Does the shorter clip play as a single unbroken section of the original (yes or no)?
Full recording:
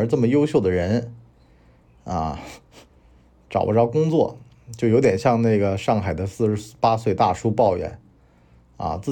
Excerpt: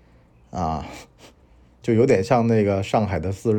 no